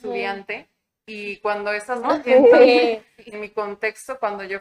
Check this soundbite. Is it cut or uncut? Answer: cut